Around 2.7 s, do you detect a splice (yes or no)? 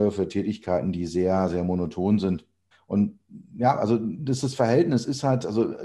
yes